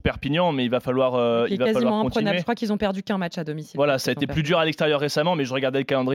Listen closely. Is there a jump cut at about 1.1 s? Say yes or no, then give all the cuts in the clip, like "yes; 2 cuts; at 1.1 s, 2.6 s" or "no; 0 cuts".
no; 0 cuts